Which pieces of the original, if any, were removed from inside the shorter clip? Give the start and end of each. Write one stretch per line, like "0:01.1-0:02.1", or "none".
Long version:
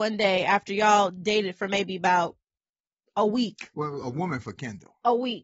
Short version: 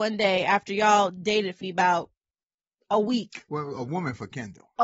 0:01.6-0:01.9